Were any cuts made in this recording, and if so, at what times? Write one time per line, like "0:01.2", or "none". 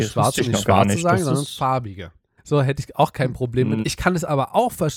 0:02.4
0:03.8